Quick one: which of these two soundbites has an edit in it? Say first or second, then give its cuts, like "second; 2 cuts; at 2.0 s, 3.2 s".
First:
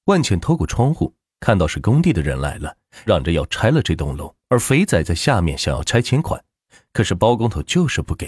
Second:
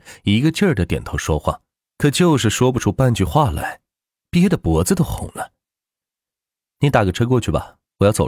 first; 2 cuts; at 3.1 s, 4.4 s